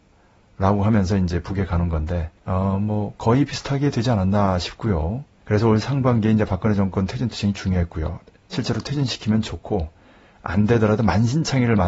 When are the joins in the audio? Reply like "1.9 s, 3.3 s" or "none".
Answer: 2.4 s, 5.4 s